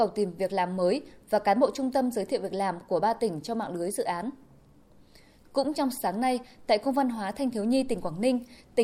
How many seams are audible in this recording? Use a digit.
0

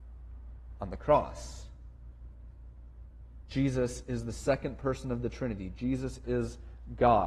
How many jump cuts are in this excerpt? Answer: 0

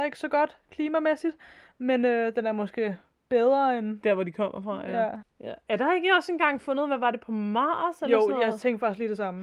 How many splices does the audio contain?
1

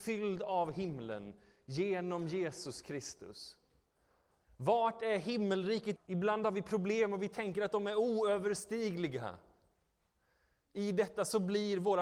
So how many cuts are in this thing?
1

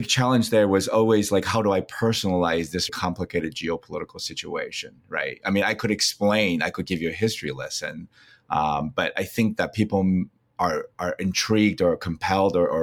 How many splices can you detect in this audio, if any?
1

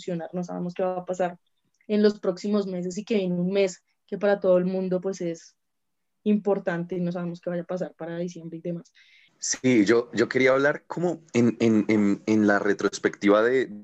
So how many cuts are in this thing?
1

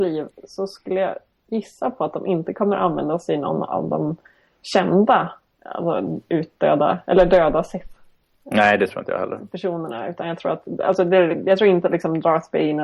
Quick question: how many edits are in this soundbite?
0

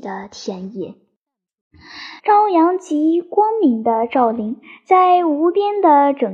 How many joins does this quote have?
1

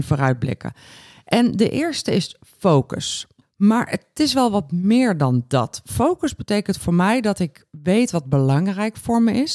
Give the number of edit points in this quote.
1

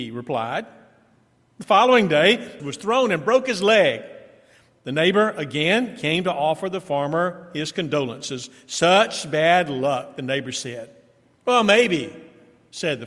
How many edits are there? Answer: 1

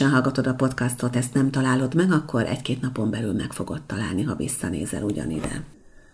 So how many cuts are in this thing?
0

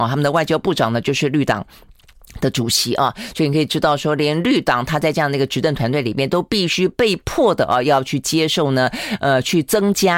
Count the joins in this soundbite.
0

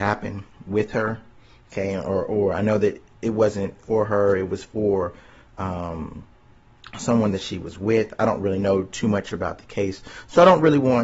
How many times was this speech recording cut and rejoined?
0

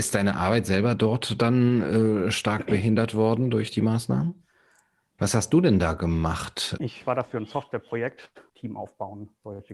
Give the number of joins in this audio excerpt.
3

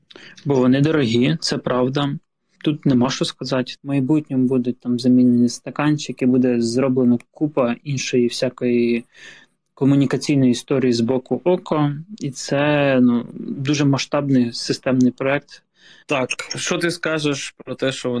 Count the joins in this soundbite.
3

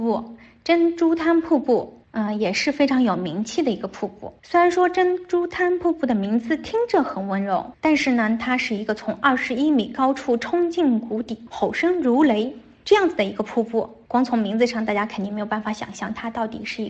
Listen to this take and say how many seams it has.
0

